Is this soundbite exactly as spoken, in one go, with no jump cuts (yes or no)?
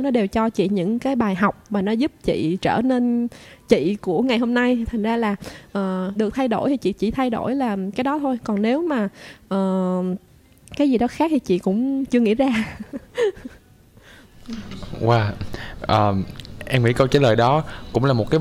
no